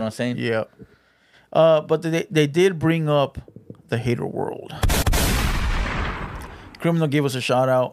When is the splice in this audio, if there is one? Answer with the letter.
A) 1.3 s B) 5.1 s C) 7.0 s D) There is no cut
D